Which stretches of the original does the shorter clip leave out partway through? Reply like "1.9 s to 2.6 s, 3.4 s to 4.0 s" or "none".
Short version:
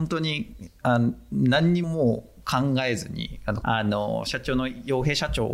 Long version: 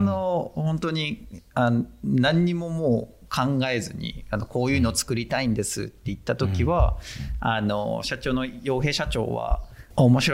2.5 s to 2.7 s, 4.5 s to 7.4 s